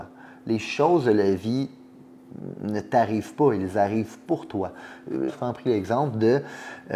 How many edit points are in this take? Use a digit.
1